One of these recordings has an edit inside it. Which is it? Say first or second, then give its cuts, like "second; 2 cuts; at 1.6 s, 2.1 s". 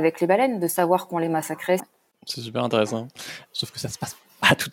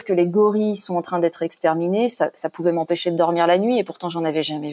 first; 2 cuts; at 1.8 s, 3.5 s